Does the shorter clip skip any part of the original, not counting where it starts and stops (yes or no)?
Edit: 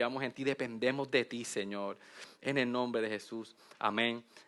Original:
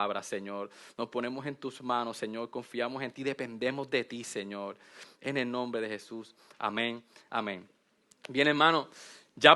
no